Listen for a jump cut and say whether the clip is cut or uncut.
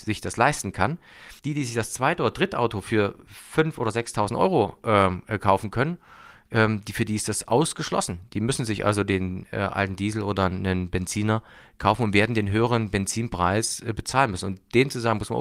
cut